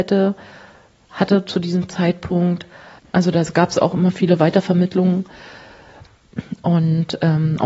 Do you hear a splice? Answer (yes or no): yes